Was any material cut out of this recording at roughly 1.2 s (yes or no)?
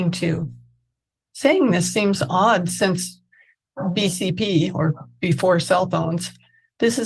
no